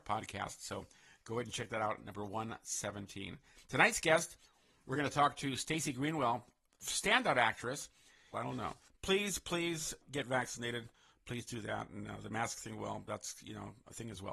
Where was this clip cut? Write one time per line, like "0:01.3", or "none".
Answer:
0:08.3